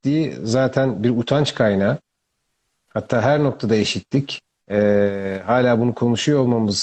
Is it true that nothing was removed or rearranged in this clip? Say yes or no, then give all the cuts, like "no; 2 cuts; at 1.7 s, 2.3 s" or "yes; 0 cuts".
yes; 0 cuts